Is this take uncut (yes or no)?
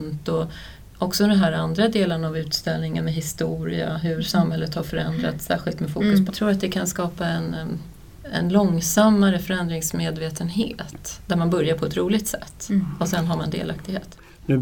no